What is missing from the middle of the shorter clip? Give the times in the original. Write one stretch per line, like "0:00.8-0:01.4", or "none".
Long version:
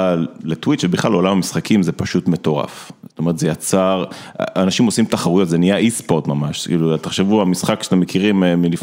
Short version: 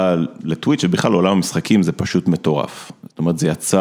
none